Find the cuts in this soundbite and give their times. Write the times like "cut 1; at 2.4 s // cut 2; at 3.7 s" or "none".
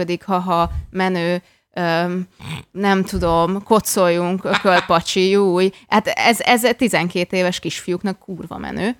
none